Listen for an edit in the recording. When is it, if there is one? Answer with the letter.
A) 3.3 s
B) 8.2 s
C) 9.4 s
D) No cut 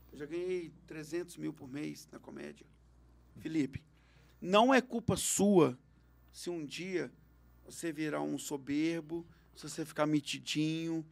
A